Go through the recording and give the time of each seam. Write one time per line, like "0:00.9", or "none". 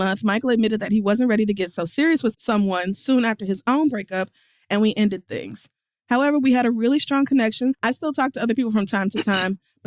0:02.3
0:07.7